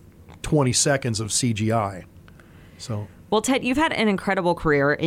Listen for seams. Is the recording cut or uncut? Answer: uncut